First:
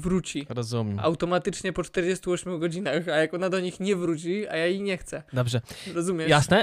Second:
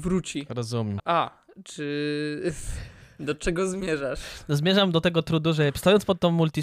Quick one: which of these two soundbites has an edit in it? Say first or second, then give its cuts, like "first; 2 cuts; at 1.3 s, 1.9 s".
second; 1 cut; at 1.0 s